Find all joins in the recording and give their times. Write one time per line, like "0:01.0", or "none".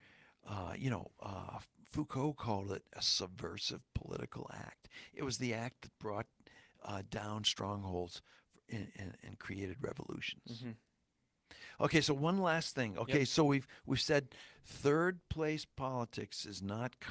none

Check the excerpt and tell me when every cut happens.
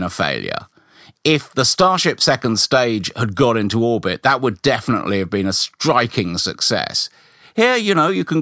none

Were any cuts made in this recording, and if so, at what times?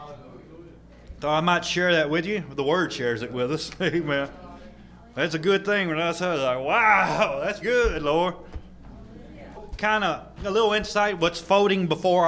0:07.6
0:09.5

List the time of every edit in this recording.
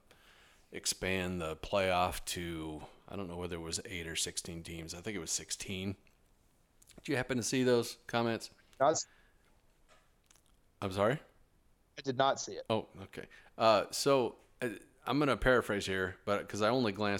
none

